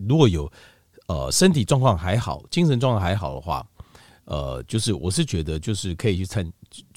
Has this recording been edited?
no; 0 cuts

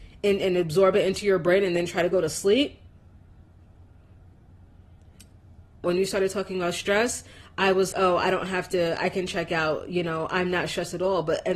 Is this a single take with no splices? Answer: no; 2 cuts; at 5.8 s, 7.9 s

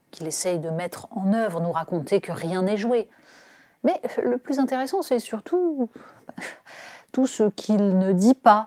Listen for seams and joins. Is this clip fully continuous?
yes; 0 cuts

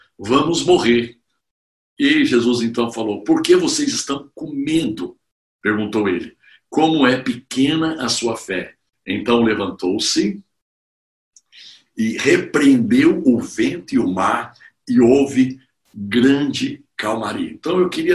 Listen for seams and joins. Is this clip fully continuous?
yes; 0 cuts

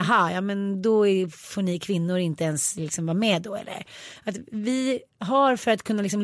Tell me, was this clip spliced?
no; 0 cuts

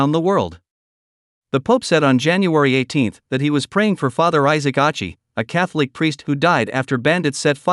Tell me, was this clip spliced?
no; 0 cuts

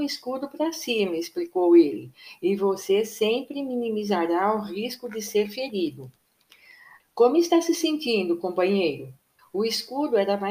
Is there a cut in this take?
yes; 2 cuts; at 7.0 s, 9.4 s

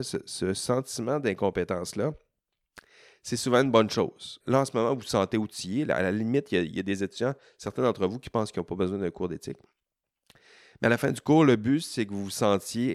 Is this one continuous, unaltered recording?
no; 1 cut; at 4.4 s

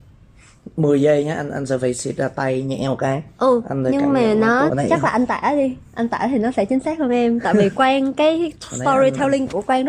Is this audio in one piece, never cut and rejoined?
no; 1 cut; at 4.7 s

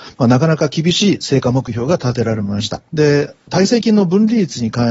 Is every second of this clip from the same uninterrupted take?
no; 1 cut; at 2.9 s

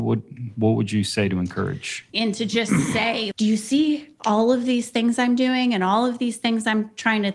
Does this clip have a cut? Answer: yes; 2 cuts; at 2.1 s, 3.3 s

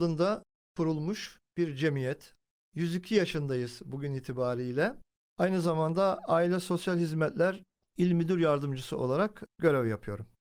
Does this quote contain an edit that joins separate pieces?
yes; 1 cut; at 5.3 s

